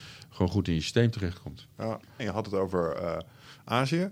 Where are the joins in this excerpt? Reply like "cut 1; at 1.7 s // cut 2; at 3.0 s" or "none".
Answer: cut 1; at 2.2 s